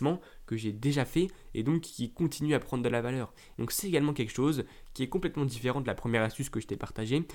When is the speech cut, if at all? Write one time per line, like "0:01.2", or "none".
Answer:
0:03.5